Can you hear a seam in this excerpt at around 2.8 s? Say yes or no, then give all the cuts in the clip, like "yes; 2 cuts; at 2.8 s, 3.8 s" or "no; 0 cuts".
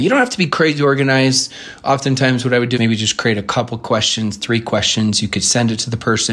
yes; 1 cut; at 2.8 s